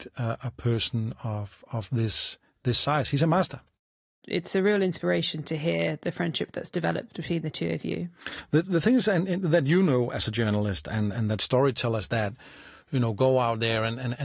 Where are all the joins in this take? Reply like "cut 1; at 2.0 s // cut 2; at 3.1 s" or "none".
none